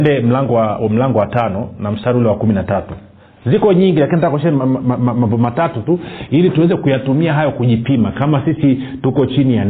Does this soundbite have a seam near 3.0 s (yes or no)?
no